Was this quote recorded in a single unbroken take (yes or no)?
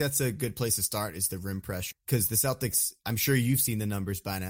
no